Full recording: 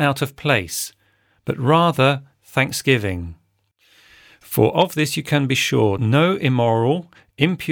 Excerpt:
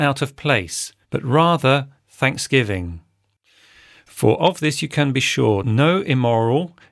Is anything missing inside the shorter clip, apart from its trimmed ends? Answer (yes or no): yes